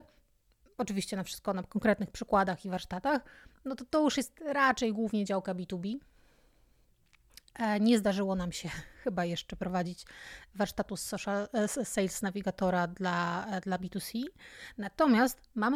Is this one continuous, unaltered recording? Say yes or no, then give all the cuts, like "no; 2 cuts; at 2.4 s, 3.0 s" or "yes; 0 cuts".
yes; 0 cuts